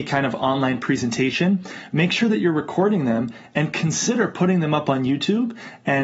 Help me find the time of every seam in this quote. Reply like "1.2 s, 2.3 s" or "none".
none